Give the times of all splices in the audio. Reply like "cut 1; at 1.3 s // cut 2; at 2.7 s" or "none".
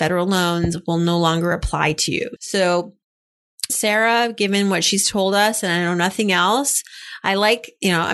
cut 1; at 2.4 s // cut 2; at 3.7 s